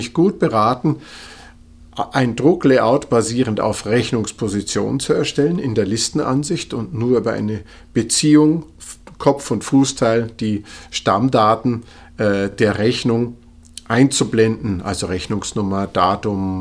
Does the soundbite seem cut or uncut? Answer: uncut